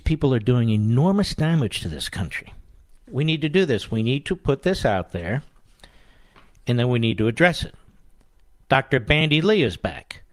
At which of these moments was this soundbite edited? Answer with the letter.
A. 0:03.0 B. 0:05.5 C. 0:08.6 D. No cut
A